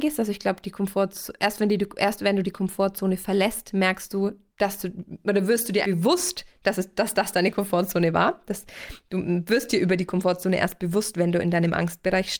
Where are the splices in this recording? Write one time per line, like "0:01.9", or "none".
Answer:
0:04.5
0:05.8